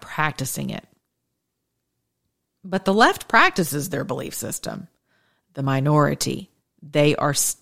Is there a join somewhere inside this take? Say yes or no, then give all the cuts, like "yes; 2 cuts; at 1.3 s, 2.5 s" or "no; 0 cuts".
no; 0 cuts